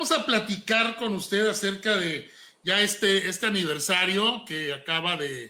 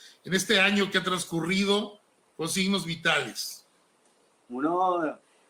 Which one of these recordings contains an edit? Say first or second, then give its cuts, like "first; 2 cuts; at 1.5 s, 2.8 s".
second; 1 cut; at 4.5 s